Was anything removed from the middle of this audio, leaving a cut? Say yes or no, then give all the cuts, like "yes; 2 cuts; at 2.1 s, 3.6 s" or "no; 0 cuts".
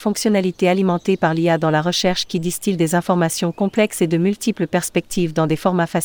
no; 0 cuts